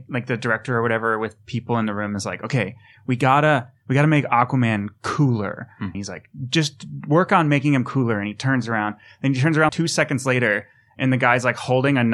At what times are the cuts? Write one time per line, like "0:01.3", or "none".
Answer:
0:05.9
0:09.7